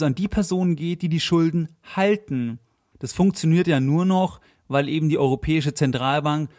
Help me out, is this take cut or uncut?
cut